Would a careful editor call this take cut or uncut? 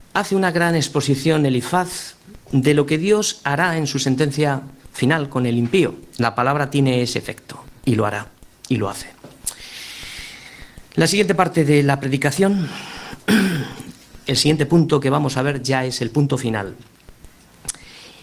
cut